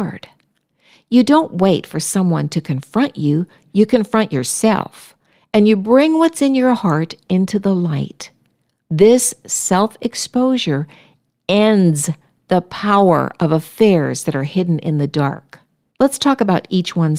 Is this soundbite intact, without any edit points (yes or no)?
no